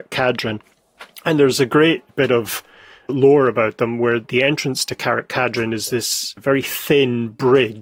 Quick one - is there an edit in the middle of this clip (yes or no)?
no